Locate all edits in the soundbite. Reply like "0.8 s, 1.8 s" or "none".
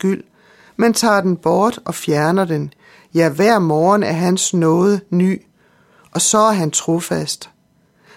none

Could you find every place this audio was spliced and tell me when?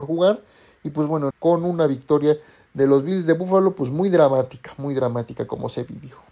1.3 s

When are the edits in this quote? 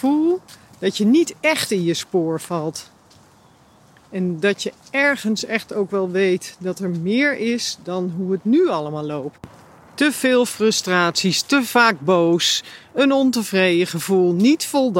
none

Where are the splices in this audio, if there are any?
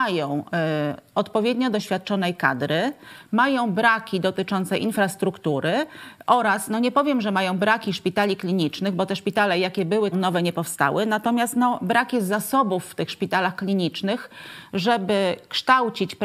10.1 s

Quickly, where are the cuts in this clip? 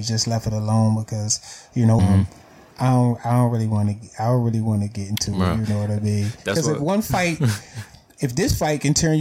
2.0 s

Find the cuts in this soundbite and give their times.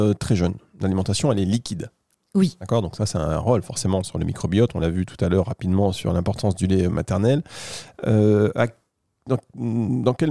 none

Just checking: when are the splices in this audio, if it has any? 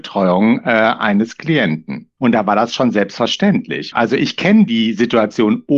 2.2 s, 3.9 s

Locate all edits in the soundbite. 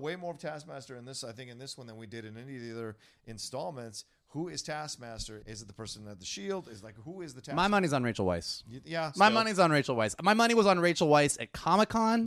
5.4 s

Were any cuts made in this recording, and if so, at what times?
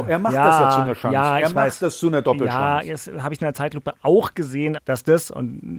4.8 s

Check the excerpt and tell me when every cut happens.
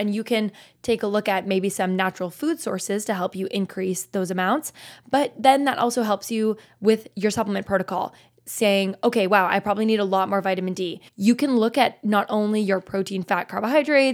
11.1 s

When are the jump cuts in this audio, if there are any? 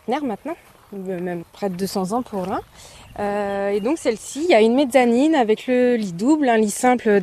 1.4 s

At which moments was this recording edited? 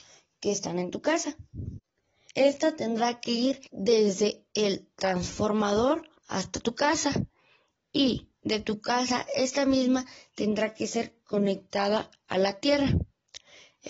2.3 s, 3.7 s, 6.2 s

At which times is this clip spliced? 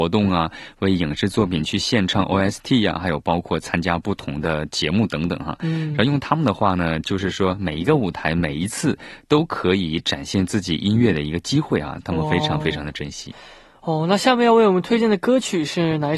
none

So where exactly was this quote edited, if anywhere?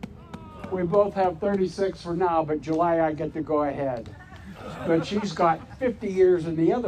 none

